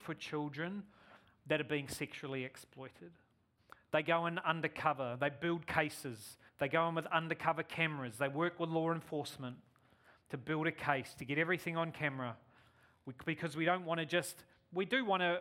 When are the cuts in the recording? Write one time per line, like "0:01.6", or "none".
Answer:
0:06.5